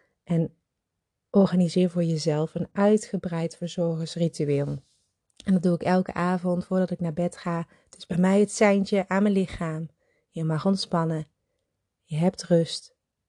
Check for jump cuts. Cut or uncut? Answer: uncut